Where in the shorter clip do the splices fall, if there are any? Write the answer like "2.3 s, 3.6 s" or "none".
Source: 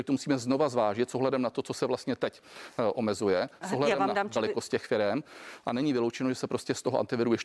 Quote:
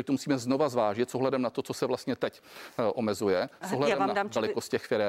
none